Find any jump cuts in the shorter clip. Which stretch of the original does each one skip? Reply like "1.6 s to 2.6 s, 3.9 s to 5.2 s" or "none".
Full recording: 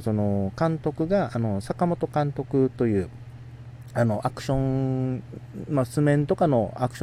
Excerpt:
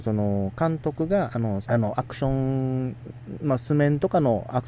1.6 s to 3.9 s

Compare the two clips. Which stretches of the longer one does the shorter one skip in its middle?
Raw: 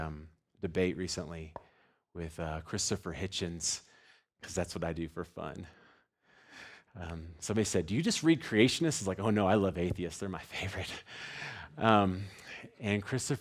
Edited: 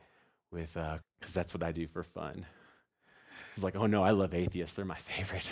2.6 s to 4.2 s, 6.8 s to 9.0 s

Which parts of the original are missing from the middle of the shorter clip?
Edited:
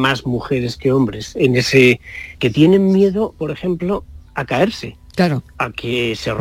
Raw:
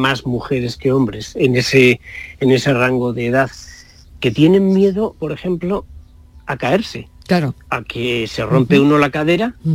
2.4 s to 4.2 s, 6.1 s to 6.4 s

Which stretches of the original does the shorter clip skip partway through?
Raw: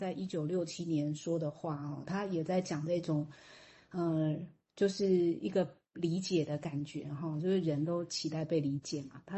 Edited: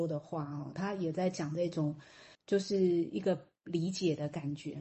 3.7 s to 4.6 s

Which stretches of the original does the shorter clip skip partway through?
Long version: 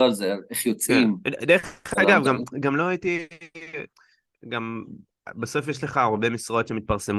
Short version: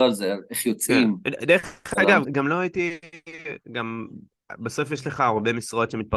2.2 s to 2.5 s, 3.9 s to 4.4 s

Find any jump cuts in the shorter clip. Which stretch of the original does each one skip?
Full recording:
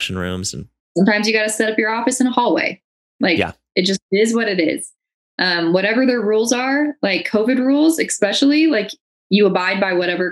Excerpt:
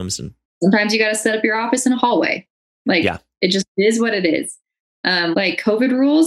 5.7 s to 7.0 s

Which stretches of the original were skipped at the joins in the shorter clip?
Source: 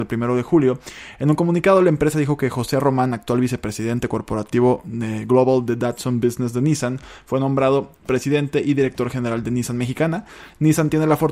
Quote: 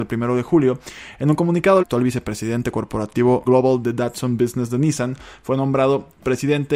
1.8 s to 3.2 s, 4.8 s to 5.3 s

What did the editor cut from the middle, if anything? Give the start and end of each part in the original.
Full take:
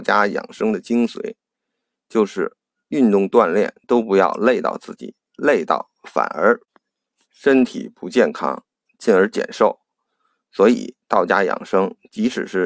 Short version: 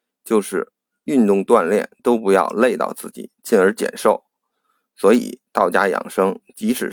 5.2 s to 8.9 s

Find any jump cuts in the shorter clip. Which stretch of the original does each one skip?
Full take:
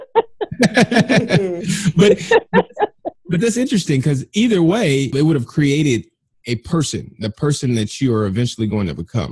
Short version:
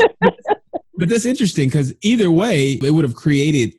none

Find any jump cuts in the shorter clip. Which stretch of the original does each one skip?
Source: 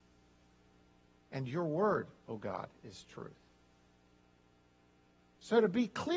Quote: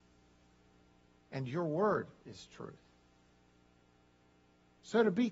2.2 s to 2.8 s

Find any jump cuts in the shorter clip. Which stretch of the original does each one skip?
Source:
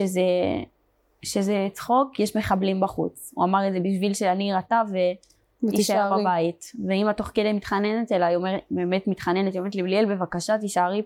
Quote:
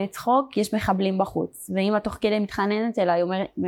3.3 s to 6.8 s

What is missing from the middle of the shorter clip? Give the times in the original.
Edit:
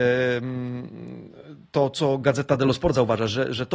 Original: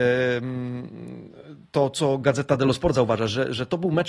none

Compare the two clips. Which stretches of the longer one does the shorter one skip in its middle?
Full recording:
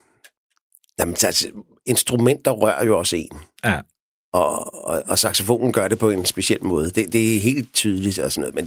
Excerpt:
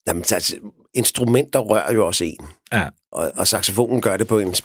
4.0 s to 4.8 s

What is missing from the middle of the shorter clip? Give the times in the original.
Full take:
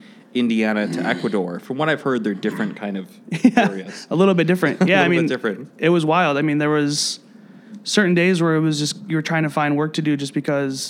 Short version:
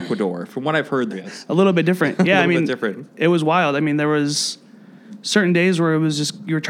2.2 s to 3.7 s

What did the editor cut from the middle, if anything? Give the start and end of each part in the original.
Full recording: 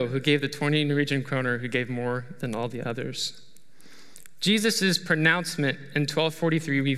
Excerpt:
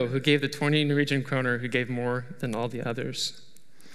none

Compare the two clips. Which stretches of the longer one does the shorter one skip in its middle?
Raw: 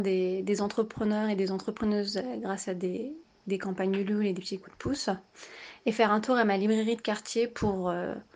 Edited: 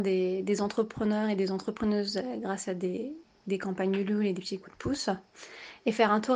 none

